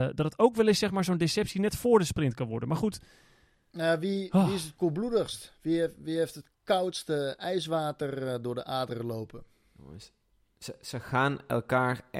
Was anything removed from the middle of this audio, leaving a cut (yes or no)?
no